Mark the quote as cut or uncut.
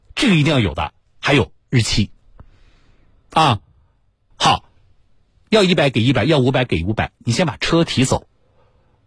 cut